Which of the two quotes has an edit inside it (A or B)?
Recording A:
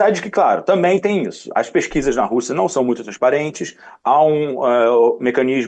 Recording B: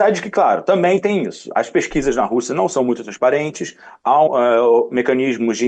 B